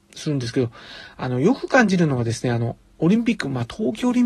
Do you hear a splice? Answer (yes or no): no